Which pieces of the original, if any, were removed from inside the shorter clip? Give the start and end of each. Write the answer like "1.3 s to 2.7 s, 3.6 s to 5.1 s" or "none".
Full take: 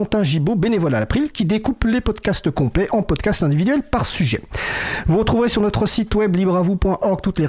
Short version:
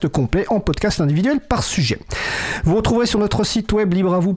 none